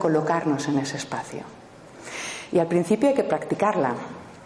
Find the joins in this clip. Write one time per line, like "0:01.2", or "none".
none